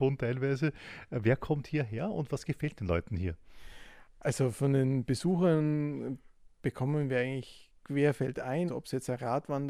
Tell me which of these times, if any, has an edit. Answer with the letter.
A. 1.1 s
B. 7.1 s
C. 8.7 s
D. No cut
C